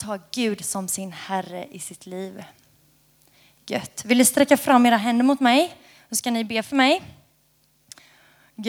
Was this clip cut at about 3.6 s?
no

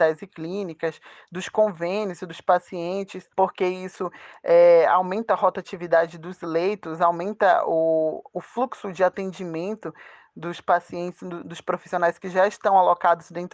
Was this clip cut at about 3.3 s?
yes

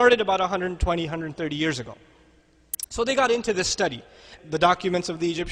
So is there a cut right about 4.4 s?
yes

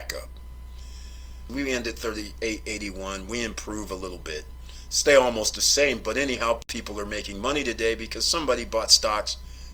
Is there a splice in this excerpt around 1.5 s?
yes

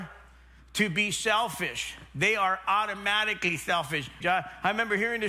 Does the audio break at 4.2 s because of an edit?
yes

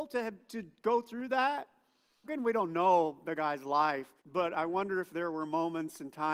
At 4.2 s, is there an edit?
yes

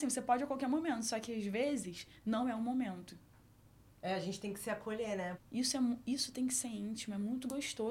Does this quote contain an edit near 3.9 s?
no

